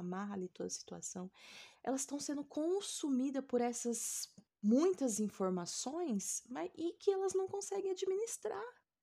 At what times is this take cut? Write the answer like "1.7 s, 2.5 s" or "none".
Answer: 1.7 s